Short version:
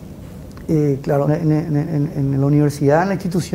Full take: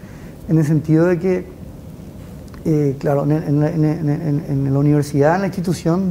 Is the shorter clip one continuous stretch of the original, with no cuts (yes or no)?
no